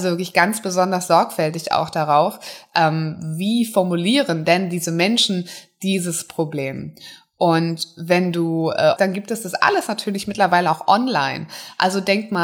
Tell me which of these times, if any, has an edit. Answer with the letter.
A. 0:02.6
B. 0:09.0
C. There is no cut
B